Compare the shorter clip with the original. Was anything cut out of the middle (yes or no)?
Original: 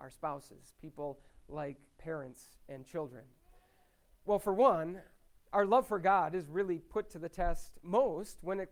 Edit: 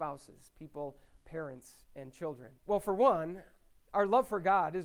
yes